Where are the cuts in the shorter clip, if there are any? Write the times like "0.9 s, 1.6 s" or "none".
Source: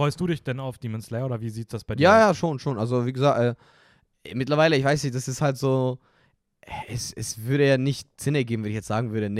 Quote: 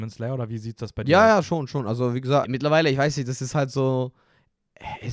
2.4 s